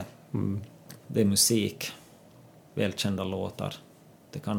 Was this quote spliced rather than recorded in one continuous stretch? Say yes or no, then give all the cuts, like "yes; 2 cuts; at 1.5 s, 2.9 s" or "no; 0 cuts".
yes; 1 cut; at 1.0 s